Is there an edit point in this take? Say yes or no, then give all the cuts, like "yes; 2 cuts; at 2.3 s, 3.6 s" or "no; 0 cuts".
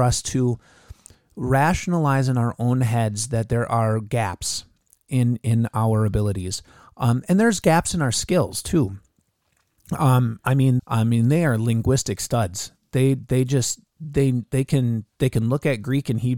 yes; 1 cut; at 10.8 s